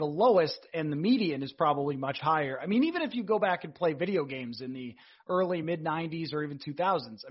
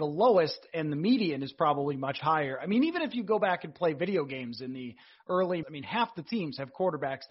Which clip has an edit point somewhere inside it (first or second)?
second